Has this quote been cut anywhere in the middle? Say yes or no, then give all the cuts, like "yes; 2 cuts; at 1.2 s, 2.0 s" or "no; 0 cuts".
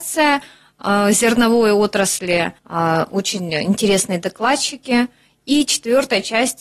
yes; 1 cut; at 2.6 s